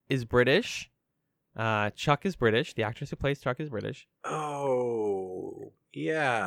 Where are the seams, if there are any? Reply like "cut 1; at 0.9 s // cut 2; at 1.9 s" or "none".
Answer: none